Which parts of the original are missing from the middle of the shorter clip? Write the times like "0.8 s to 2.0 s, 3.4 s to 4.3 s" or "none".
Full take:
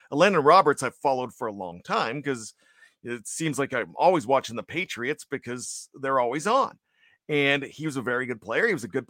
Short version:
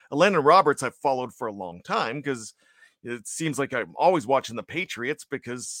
none